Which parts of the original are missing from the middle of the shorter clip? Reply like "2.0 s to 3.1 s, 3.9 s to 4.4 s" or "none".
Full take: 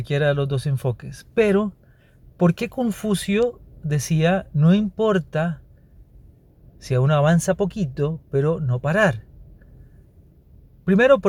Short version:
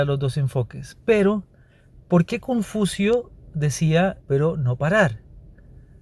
4.5 s to 8.2 s